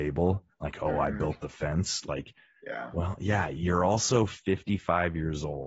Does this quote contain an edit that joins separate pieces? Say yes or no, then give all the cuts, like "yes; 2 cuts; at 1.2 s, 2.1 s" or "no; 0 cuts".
no; 0 cuts